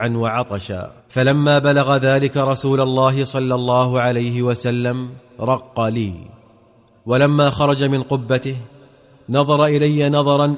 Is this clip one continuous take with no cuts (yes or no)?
no